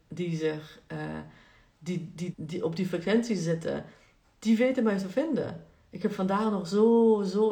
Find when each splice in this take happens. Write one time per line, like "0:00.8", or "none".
0:02.3